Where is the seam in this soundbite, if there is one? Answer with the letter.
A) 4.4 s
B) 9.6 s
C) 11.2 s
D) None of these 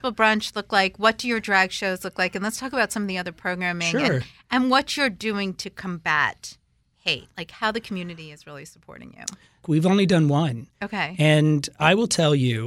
B